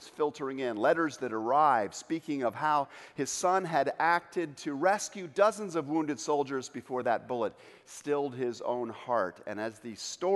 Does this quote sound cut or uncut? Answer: uncut